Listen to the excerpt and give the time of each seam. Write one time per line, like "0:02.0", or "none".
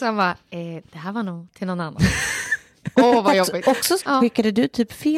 0:04.0